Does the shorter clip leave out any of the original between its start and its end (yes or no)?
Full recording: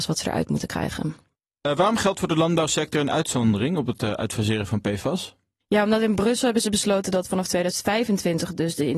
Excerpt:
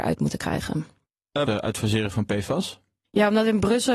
yes